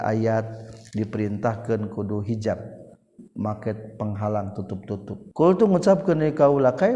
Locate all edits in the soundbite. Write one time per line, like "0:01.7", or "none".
0:05.3

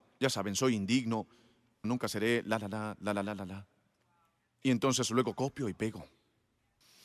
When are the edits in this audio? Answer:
0:01.8

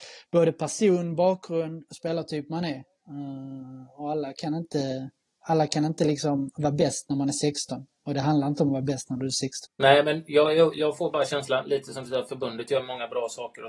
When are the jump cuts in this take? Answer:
0:09.7

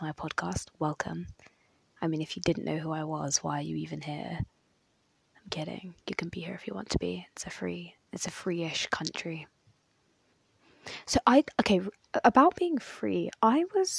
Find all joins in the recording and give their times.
none

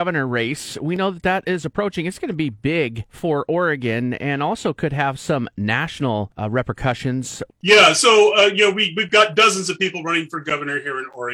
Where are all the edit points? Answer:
0:07.5

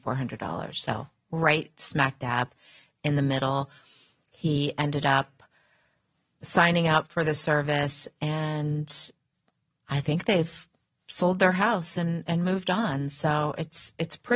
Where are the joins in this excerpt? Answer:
none

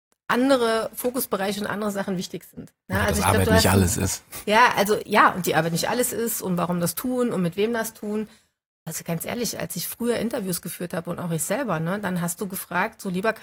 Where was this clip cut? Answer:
none

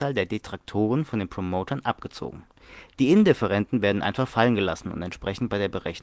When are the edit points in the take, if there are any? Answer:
none

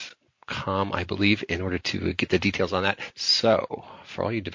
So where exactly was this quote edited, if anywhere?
0:03.1

